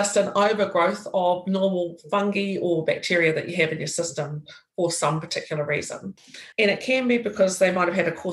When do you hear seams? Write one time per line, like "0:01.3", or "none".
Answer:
0:06.5